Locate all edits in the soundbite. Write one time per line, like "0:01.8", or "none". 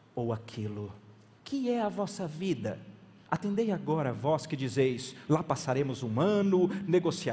0:01.4
0:03.3
0:05.3